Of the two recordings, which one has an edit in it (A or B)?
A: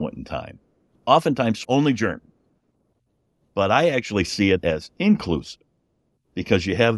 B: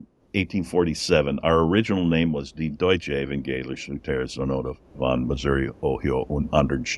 A